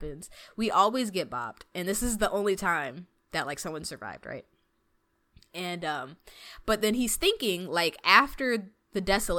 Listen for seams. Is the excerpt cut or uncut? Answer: uncut